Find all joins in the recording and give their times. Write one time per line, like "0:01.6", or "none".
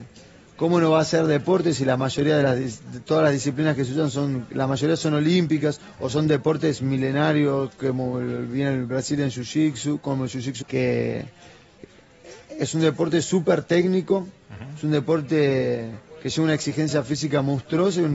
0:10.6

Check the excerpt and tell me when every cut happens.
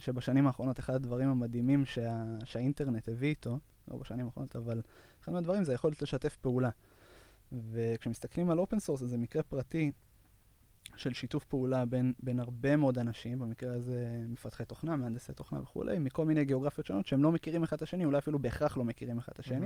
0:04.5

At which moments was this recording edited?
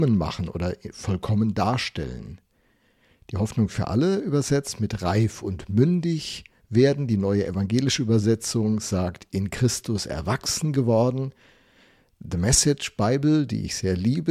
none

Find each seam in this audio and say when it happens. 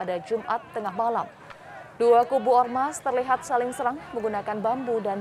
none

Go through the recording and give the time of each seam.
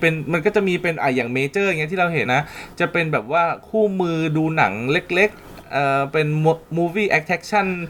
0:02.3

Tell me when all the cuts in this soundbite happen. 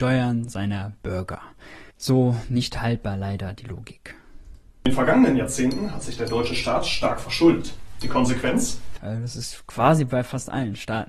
0:01.9
0:09.0

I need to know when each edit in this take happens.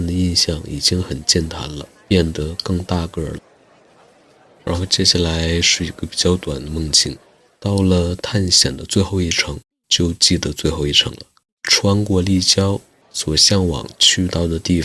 0:13.0

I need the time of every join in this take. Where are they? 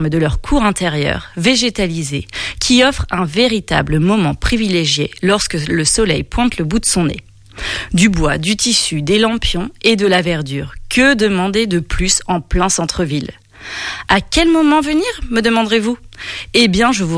none

